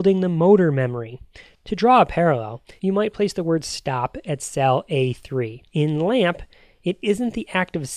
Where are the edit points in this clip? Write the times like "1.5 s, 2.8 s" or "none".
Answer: 2.8 s, 5.7 s